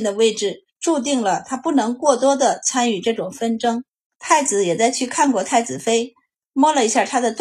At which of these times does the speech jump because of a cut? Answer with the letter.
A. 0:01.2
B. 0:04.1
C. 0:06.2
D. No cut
B